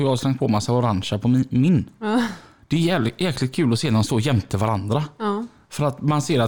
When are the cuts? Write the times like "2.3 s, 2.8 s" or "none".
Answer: none